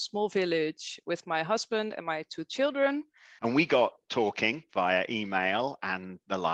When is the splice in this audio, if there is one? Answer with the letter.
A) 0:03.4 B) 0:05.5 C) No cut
A